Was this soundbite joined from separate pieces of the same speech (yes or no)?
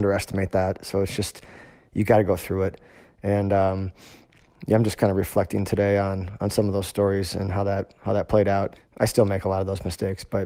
yes